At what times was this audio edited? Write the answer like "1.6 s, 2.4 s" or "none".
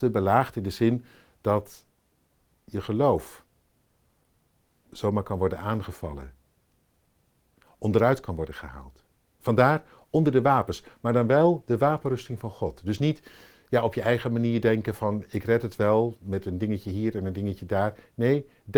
none